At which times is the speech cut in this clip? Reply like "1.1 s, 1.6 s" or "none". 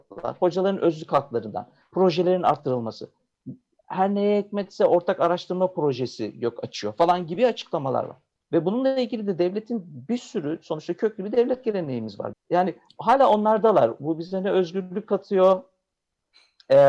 8.4 s, 12.3 s